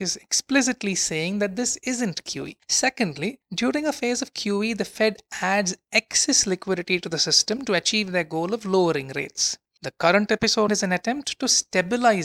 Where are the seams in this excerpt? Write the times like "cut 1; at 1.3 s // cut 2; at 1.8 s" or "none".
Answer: cut 1; at 10.7 s